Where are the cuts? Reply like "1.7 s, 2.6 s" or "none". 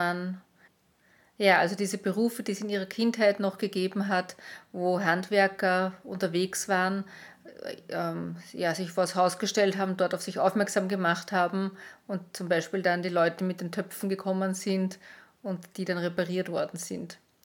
none